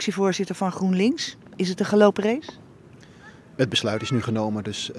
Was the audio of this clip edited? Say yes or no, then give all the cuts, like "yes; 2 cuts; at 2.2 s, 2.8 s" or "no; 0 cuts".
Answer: no; 0 cuts